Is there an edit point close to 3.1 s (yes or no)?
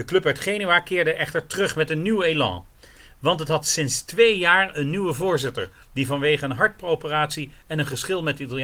no